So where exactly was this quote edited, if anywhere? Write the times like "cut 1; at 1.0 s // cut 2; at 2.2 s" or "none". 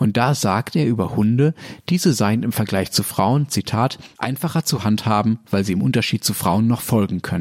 none